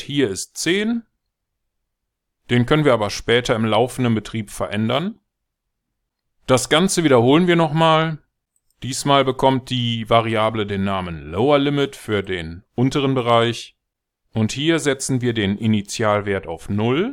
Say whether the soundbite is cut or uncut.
uncut